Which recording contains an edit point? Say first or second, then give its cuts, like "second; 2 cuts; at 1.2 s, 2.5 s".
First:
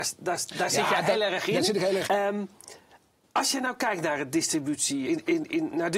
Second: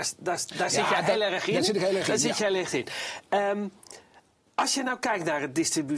first; 2 cuts; at 2.0 s, 5.0 s